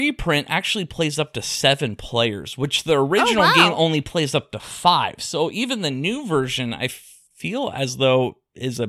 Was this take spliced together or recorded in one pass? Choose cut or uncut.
uncut